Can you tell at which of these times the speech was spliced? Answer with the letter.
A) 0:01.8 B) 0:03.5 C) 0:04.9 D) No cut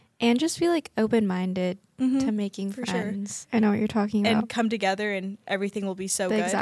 B